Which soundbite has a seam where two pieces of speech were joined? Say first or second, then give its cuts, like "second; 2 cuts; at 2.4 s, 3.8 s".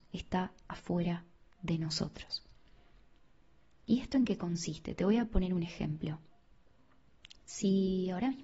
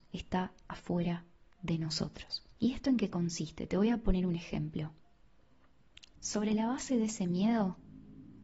second; 2 cuts; at 2.5 s, 6.1 s